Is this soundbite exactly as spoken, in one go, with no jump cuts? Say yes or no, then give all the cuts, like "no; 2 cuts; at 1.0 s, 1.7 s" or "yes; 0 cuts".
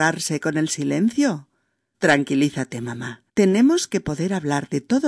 no; 2 cuts; at 1.9 s, 3.3 s